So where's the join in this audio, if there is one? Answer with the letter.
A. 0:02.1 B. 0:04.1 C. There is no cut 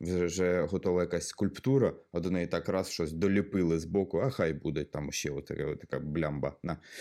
C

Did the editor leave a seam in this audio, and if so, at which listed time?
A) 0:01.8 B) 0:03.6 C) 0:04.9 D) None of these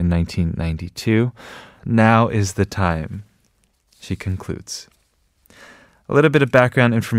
A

